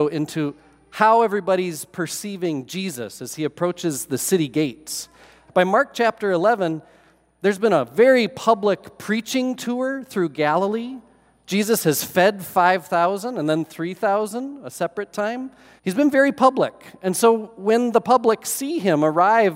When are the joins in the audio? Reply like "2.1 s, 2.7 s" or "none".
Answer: 5.5 s, 15.8 s